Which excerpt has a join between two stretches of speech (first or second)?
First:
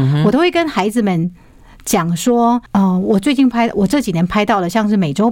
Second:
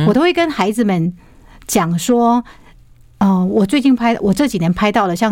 first